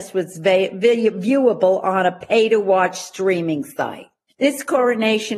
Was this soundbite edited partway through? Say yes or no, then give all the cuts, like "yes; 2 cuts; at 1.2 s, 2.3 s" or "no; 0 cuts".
yes; 1 cut; at 4.3 s